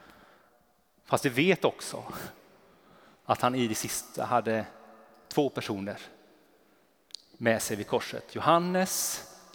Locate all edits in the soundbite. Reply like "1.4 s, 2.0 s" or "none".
none